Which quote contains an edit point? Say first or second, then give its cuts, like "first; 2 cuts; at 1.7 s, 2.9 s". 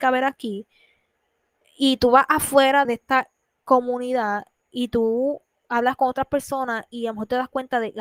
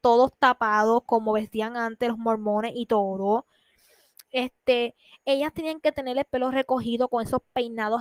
first; 1 cut; at 2.8 s